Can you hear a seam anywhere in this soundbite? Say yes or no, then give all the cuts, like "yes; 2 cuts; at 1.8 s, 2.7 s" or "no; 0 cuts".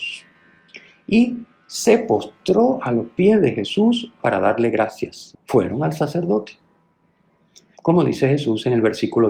yes; 3 cuts; at 4.2 s, 5.3 s, 7.7 s